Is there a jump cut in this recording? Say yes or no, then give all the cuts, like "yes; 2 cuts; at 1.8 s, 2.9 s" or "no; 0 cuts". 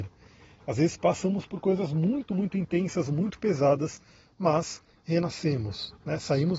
no; 0 cuts